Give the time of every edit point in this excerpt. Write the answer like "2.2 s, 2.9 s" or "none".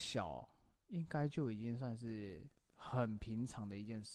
none